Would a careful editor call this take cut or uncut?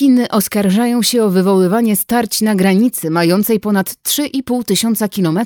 uncut